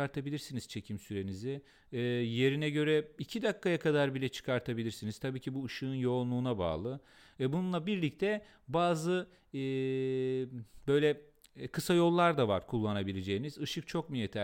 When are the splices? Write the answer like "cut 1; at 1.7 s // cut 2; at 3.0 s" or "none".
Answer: none